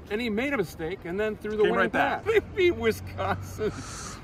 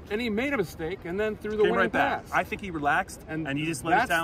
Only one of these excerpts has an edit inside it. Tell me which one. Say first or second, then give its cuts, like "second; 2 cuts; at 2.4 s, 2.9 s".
first; 1 cut; at 2.2 s